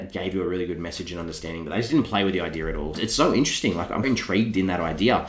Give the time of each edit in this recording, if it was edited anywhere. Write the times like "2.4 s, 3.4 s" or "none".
2.9 s, 4.0 s